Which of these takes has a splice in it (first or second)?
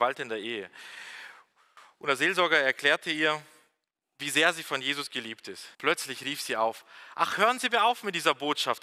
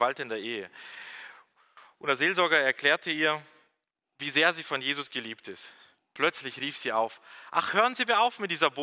first